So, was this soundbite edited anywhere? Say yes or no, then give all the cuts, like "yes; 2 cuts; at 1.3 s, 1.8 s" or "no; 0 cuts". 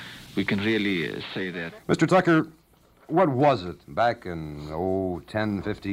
yes; 2 cuts; at 1.8 s, 3.8 s